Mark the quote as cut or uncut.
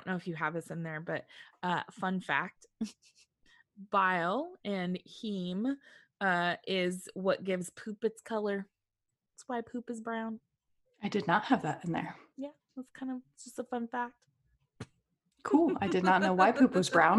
uncut